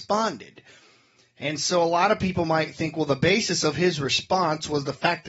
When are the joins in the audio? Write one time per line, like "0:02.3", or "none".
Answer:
none